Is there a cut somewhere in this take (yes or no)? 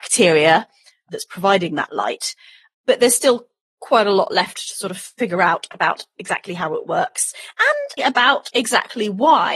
yes